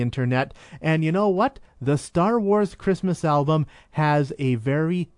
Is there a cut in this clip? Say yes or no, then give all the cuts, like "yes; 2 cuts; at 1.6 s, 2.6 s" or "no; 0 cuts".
no; 0 cuts